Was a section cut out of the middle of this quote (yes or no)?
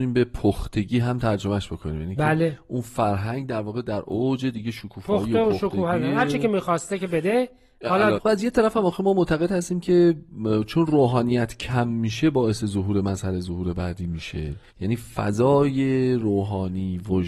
yes